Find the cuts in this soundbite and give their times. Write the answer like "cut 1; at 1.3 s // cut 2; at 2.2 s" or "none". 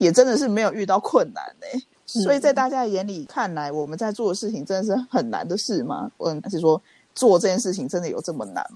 cut 1; at 6.4 s